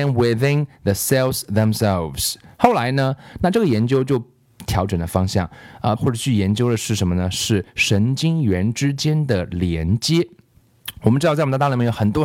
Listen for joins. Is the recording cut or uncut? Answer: cut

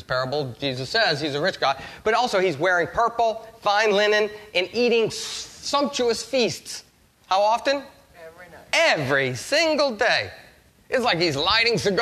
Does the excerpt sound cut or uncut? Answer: uncut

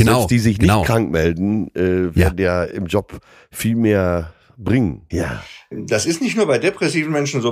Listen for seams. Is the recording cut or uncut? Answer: cut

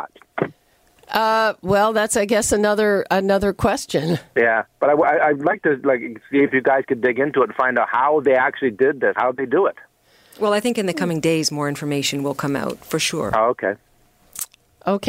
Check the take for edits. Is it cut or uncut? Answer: cut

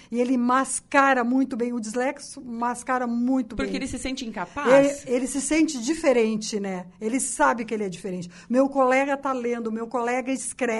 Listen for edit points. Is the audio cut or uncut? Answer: uncut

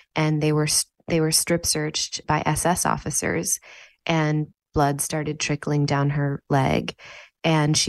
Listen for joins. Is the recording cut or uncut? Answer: cut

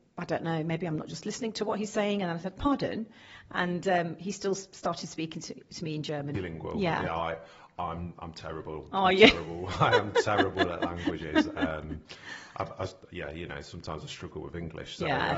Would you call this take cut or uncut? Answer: cut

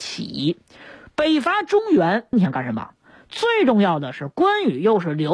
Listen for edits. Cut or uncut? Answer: cut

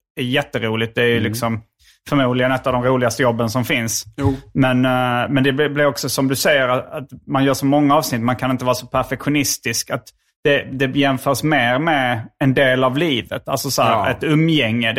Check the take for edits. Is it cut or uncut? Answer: uncut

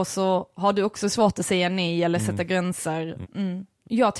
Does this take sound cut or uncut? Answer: cut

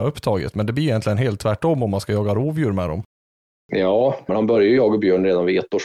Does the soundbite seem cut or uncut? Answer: cut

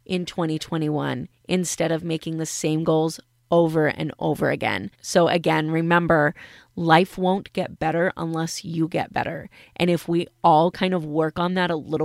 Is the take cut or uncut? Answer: cut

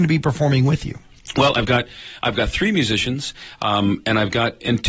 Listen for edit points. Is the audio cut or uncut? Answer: uncut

